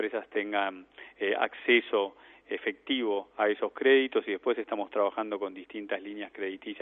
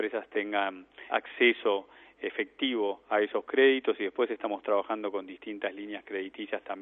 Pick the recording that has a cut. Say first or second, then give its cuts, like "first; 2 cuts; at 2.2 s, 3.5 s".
second; 1 cut; at 1.1 s